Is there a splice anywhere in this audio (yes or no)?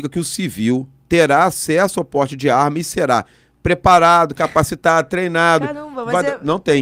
no